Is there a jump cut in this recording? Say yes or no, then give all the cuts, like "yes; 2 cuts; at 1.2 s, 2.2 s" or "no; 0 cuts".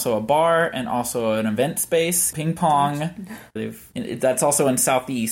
yes; 2 cuts; at 2.3 s, 3.6 s